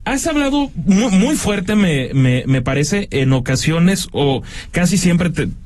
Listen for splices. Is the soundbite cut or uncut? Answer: uncut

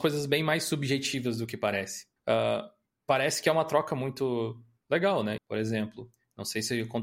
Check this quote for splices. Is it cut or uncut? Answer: cut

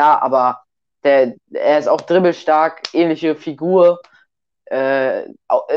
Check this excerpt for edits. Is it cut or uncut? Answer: uncut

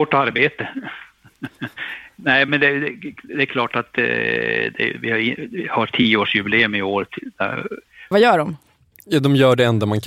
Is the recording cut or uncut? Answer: cut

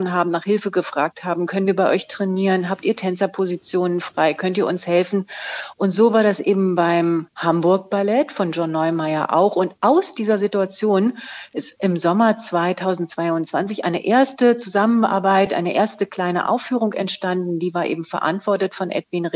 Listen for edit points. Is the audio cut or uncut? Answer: uncut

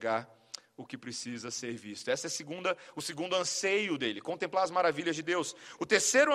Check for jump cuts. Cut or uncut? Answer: uncut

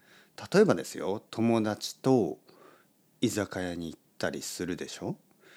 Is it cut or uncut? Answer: uncut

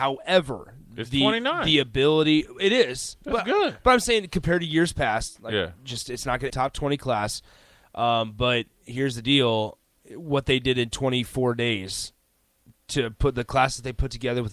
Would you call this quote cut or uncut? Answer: cut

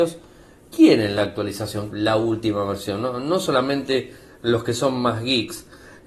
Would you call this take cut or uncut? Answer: cut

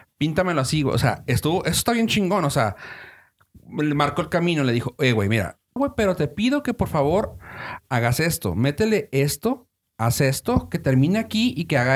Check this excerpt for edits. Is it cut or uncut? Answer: cut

